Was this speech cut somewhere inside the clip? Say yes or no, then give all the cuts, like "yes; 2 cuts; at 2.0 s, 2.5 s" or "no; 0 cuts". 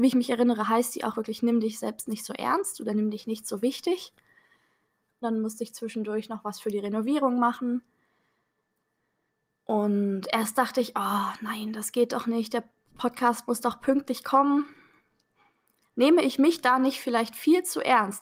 yes; 2 cuts; at 5.2 s, 15.9 s